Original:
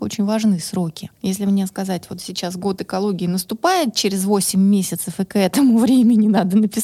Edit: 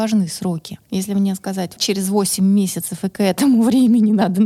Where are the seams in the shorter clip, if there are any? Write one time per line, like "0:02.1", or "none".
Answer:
0:01.8